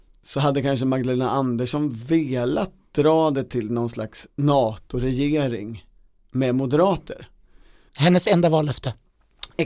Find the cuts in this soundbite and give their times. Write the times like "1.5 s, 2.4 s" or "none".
7.9 s